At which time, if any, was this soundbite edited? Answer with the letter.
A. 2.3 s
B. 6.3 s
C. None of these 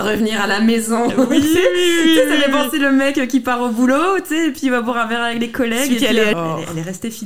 B